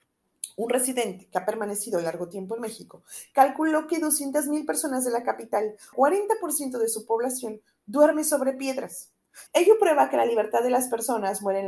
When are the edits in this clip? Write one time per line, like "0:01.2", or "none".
0:05.9
0:09.5